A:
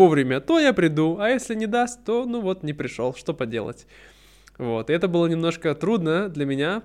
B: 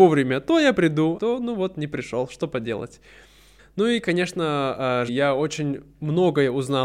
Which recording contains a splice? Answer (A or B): B